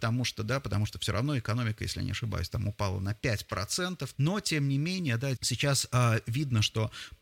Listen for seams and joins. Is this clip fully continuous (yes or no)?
no